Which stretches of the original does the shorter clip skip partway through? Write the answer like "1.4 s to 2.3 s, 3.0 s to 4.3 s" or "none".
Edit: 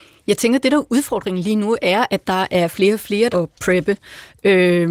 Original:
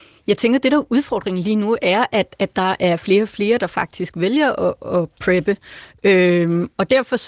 2.1 s to 2.4 s, 3.6 s to 4.9 s